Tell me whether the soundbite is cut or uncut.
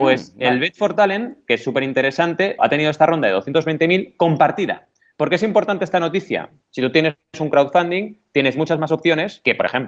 cut